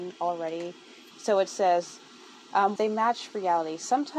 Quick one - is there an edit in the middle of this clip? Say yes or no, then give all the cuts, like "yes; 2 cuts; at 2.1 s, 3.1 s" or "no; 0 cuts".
yes; 2 cuts; at 1.1 s, 2.8 s